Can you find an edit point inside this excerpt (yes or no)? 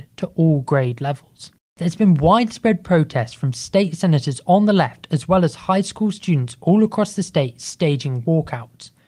no